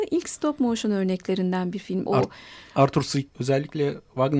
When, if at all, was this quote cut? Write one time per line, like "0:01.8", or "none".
0:02.1
0:03.3